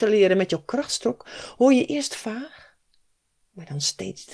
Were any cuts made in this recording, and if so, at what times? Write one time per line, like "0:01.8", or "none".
none